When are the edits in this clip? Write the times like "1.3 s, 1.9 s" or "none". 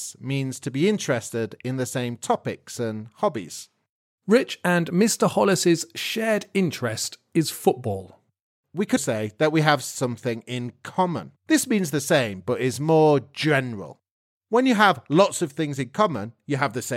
9.0 s, 11.4 s